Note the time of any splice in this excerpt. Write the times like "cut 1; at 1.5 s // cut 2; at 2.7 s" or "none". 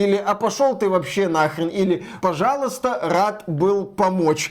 cut 1; at 2.2 s